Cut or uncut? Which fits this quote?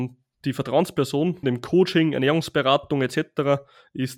cut